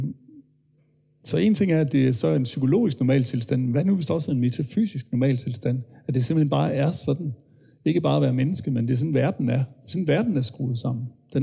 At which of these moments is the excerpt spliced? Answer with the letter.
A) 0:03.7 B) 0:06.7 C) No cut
C